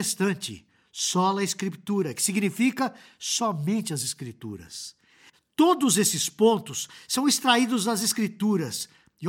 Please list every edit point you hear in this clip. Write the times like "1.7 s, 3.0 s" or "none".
5.3 s